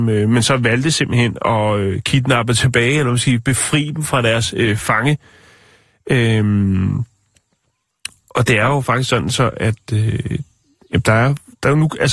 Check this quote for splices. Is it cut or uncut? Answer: uncut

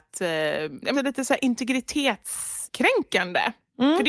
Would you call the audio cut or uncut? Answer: cut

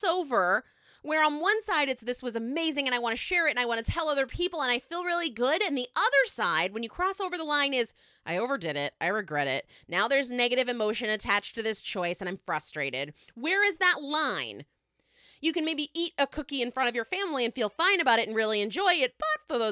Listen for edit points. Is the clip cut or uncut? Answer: uncut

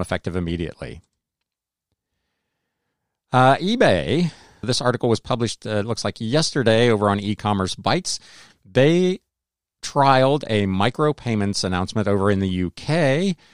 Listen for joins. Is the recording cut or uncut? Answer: cut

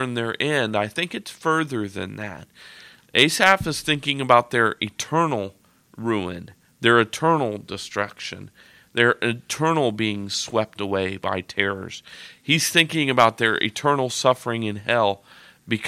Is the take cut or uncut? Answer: uncut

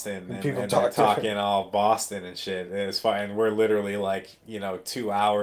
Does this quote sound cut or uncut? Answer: uncut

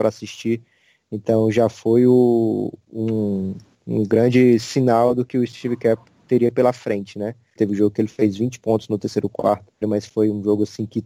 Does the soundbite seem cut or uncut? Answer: cut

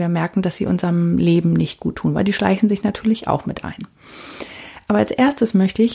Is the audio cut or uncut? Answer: uncut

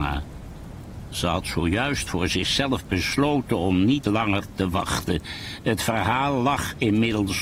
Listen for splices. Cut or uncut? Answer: uncut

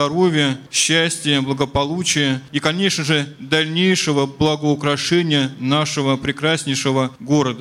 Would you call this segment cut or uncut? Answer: uncut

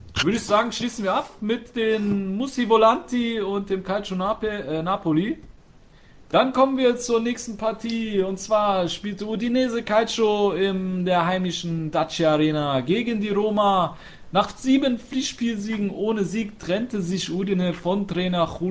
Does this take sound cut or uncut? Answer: uncut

